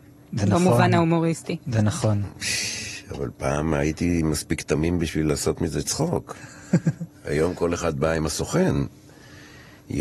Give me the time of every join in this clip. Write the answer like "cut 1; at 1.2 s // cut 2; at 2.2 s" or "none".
none